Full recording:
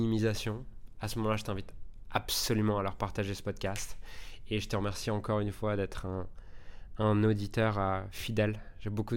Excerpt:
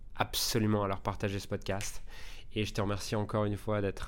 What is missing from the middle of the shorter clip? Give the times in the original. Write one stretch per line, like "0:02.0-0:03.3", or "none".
none